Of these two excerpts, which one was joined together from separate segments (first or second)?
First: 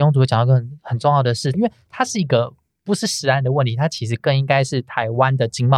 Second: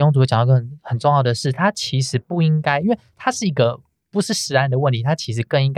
first